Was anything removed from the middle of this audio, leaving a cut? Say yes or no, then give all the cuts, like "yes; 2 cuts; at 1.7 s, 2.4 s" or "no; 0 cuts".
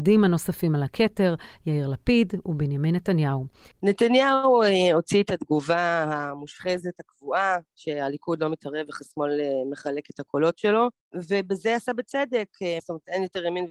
yes; 2 cuts; at 3.7 s, 12.8 s